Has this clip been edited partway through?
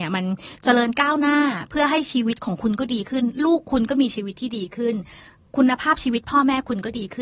no; 0 cuts

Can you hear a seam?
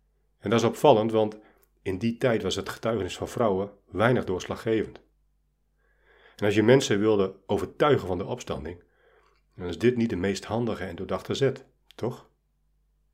no; 0 cuts

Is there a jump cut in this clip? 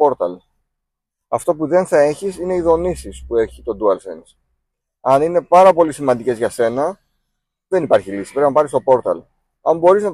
no; 0 cuts

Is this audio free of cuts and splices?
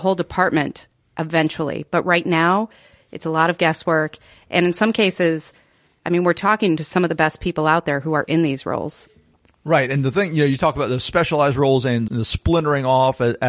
no; 2 cuts; at 3.0 s, 12.1 s

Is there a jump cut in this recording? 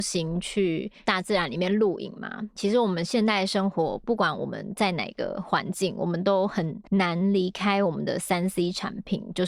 yes; 1 cut; at 6.9 s

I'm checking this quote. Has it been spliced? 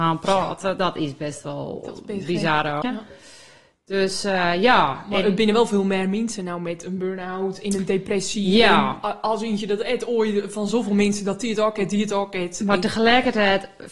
yes; 1 cut; at 2.8 s

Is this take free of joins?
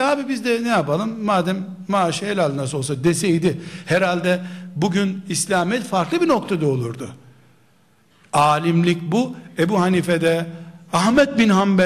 yes; 0 cuts

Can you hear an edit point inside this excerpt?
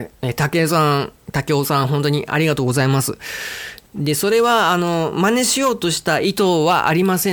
yes; 1 cut; at 3.9 s

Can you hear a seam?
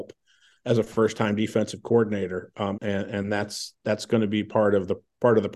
yes; 1 cut; at 2.8 s

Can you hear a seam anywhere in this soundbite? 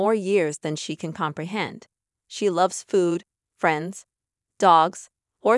no; 0 cuts

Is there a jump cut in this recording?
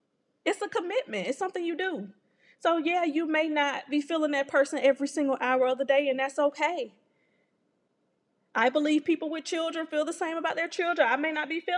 no; 0 cuts

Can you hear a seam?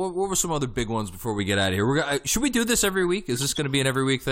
no; 0 cuts

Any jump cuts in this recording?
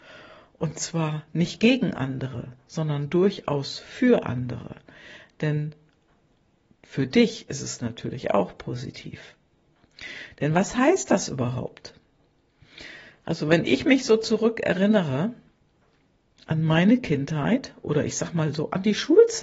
no; 0 cuts

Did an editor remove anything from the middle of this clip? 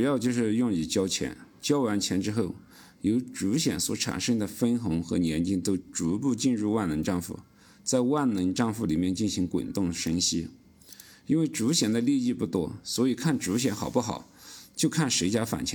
no; 0 cuts

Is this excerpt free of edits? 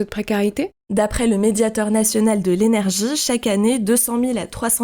yes; 0 cuts

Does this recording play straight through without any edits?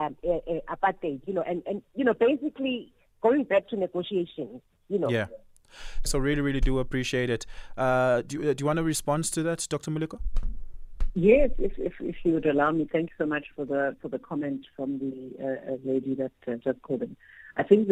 no; 1 cut; at 6.1 s

